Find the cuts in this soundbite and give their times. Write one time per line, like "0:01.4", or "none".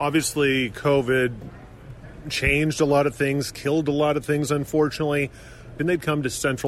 0:05.8